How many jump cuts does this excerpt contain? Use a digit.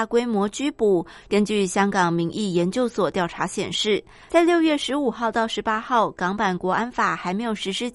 1